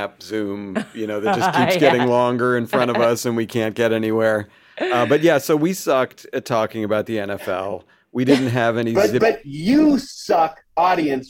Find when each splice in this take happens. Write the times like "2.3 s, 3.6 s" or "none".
none